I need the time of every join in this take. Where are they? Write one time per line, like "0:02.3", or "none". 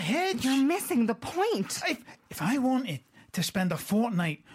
0:02.2

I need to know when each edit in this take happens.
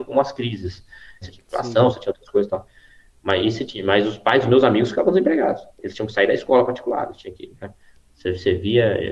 0:01.2

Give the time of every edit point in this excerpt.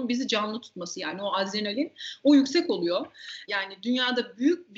0:03.5

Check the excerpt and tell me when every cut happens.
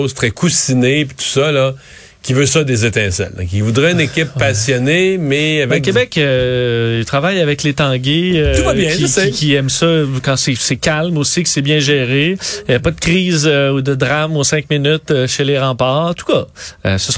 none

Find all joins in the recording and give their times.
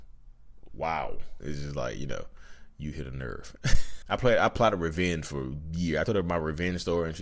0:01.4
0:04.0

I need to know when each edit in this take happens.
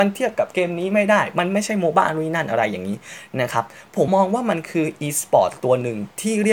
0:04.1

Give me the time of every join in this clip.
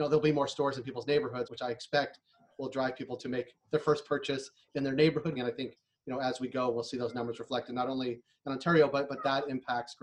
0:01.5
0:05.4

